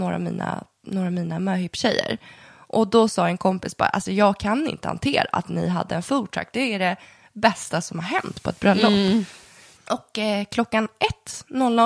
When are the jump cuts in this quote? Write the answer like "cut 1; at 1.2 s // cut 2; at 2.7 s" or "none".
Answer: cut 1; at 9.7 s